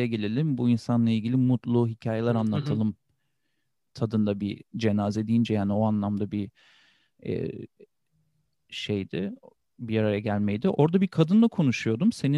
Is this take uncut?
yes; 0 cuts

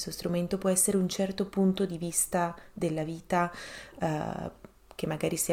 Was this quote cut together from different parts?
no; 0 cuts

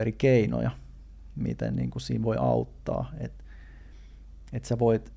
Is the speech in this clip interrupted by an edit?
no; 0 cuts

